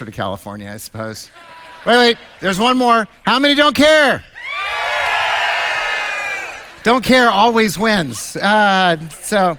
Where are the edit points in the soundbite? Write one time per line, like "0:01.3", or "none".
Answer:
none